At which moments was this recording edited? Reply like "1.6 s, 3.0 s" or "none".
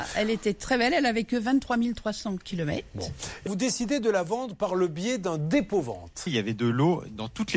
3.5 s, 6.3 s